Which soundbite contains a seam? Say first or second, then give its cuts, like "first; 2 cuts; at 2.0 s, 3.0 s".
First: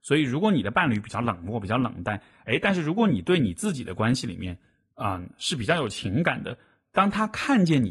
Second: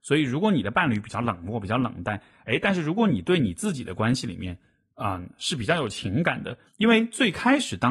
second; 1 cut; at 6.7 s